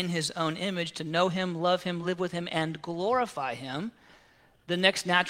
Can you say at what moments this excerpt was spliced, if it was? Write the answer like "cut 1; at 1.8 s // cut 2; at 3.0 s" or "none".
none